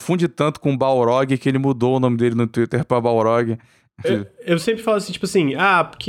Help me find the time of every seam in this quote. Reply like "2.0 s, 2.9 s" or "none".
4.0 s